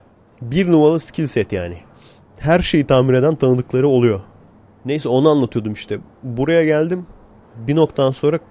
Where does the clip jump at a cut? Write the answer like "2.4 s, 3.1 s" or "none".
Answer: 7.4 s